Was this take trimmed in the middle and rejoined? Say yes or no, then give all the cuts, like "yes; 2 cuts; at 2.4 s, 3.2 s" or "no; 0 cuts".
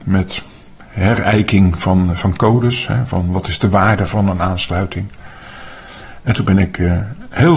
no; 0 cuts